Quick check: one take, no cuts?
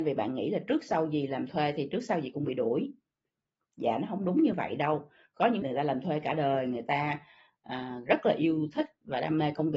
no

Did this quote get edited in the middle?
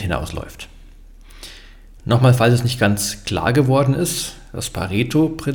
no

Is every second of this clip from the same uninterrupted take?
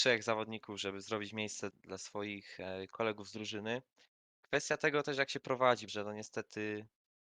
no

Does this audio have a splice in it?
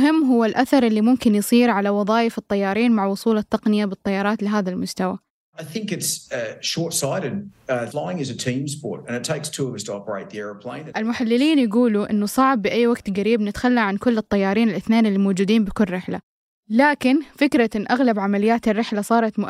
yes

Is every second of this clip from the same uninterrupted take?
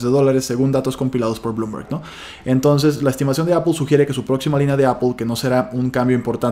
yes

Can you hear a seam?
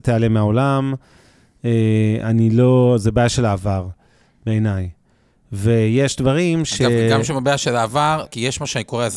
yes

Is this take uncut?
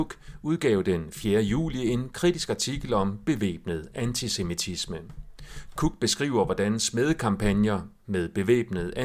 yes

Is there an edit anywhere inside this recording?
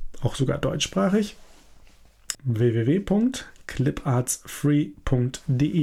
yes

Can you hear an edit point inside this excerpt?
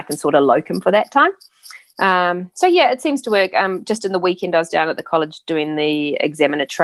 no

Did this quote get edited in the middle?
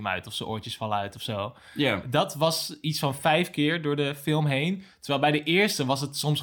no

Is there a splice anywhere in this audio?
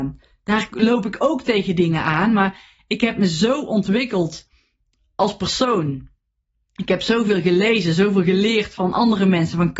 no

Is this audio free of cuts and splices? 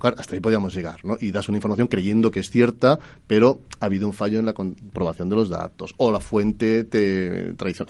yes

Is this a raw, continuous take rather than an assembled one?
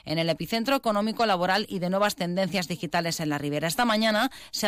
yes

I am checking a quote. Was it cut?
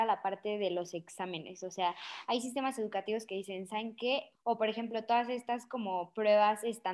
yes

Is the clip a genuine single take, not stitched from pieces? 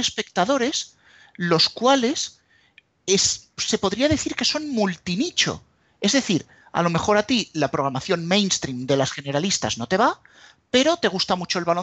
yes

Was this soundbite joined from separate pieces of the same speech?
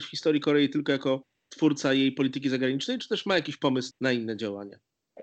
yes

